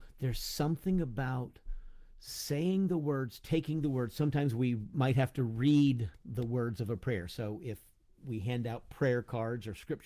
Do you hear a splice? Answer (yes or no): no